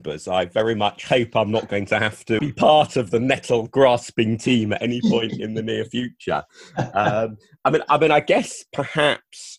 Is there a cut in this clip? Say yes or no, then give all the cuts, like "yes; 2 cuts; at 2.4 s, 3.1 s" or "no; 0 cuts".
yes; 1 cut; at 2.4 s